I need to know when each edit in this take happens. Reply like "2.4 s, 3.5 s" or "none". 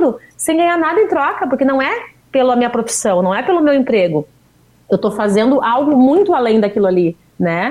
none